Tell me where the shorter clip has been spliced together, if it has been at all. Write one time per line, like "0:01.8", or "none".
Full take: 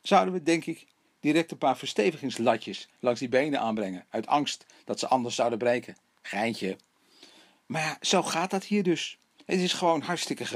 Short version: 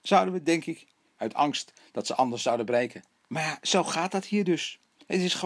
0:01.2
0:03.3